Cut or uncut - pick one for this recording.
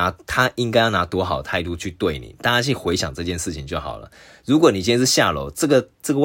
uncut